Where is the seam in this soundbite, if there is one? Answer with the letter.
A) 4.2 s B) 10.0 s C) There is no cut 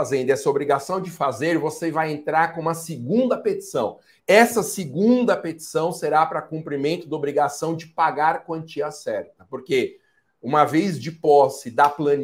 A